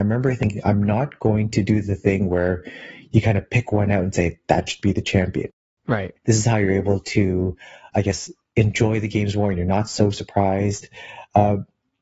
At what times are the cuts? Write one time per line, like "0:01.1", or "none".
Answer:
0:06.2
0:07.9